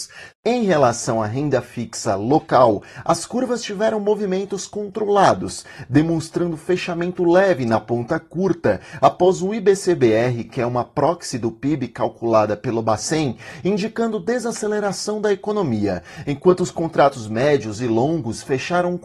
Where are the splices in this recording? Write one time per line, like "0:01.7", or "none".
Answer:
none